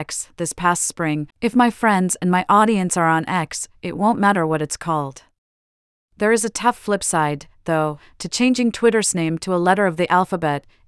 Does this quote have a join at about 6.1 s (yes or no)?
no